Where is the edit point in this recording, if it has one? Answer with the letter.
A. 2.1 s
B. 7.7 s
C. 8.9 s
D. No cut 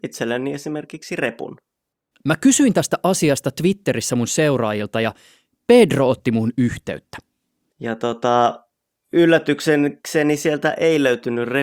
B